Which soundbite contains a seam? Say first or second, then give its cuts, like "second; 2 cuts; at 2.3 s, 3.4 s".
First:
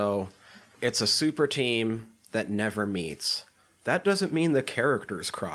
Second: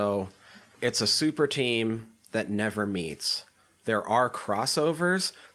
first; 1 cut; at 3.8 s